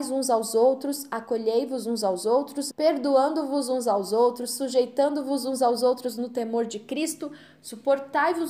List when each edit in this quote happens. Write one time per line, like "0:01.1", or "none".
0:02.7